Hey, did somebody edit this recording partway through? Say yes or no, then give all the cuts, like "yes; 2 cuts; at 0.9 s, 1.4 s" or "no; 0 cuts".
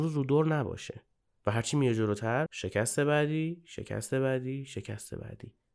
yes; 1 cut; at 2.5 s